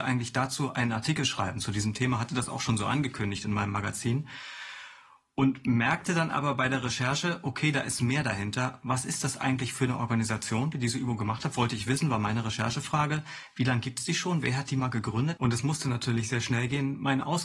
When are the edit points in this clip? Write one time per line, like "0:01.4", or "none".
0:15.4